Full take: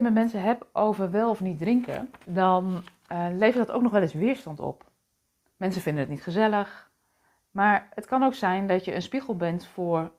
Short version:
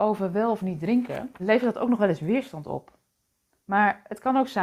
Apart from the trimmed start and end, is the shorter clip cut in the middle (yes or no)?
yes